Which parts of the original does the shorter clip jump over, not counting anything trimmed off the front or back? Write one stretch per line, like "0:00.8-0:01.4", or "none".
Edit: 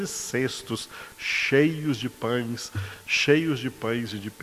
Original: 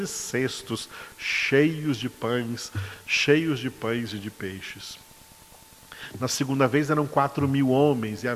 none